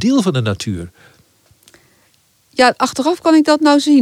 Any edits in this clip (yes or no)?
no